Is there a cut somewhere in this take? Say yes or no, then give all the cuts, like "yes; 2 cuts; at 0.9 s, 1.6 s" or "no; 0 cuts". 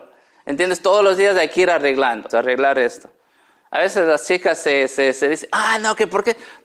yes; 1 cut; at 2.3 s